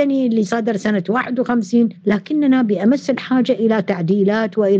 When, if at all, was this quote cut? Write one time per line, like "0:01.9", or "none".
none